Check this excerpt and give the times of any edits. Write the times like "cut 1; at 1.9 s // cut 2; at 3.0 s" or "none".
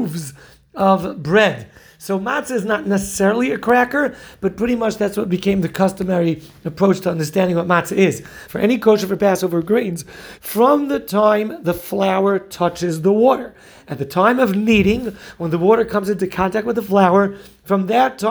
cut 1; at 8.5 s // cut 2; at 10.4 s